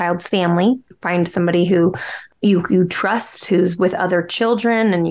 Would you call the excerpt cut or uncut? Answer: cut